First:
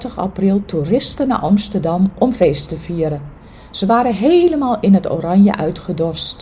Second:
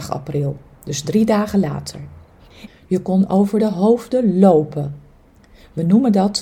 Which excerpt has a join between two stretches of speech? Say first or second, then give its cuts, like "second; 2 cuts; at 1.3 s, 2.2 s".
second; 1 cut; at 2.7 s